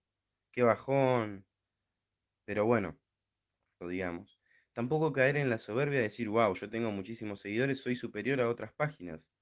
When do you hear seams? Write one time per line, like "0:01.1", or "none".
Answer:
0:03.8

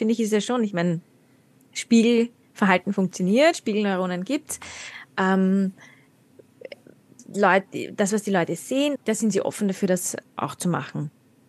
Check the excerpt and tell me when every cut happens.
0:08.9
0:10.3

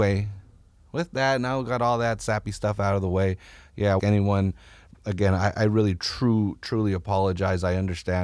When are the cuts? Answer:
0:04.0

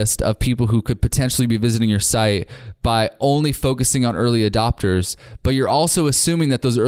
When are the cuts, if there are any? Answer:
none

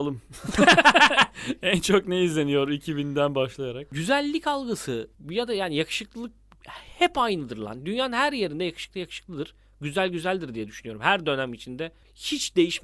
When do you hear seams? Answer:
none

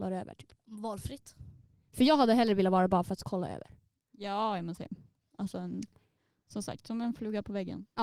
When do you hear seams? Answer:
none

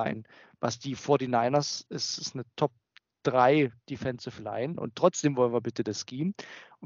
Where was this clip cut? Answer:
0:04.7

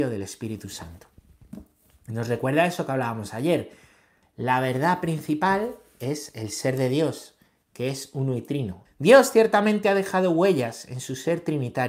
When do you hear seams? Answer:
0:04.2
0:08.9

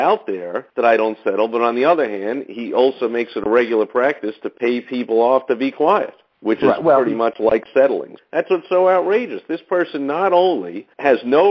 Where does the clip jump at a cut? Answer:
0:08.2

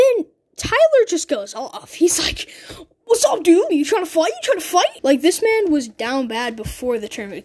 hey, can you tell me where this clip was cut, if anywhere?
0:03.7
0:05.0

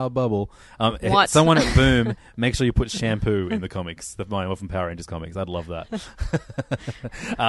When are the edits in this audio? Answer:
none

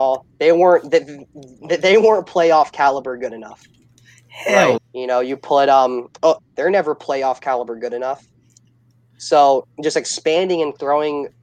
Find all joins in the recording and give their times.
0:04.8
0:06.4

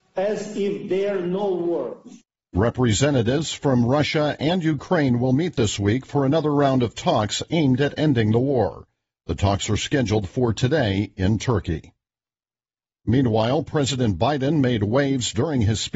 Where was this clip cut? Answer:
none

